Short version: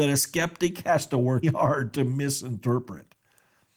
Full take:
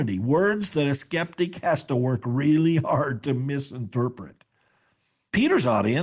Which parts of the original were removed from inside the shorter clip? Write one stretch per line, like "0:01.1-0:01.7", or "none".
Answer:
0:02.2-0:02.7